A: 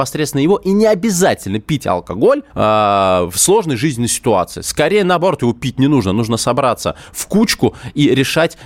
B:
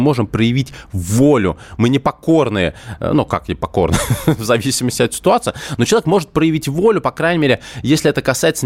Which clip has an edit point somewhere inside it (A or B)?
A